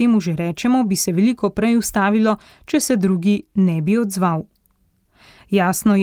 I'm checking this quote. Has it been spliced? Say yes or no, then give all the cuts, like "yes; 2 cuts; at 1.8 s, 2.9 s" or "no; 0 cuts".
no; 0 cuts